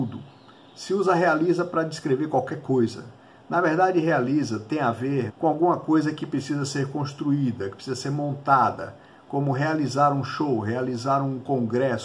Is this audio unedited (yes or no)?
no